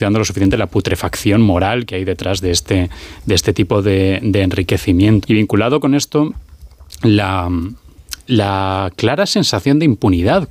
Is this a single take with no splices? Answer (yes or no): no